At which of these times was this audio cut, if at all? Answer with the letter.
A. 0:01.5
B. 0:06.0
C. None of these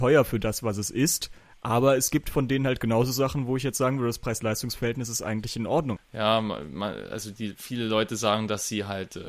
B